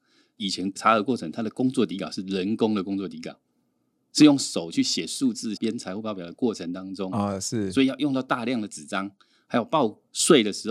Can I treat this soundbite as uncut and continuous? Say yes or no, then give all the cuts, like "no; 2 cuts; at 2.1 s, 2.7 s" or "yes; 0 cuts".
no; 1 cut; at 5.6 s